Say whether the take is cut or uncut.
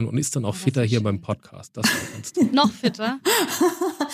uncut